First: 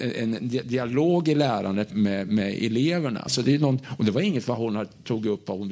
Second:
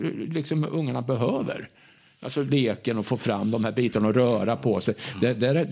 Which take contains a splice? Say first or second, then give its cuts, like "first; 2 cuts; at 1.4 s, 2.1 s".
first; 2 cuts; at 1.9 s, 3.3 s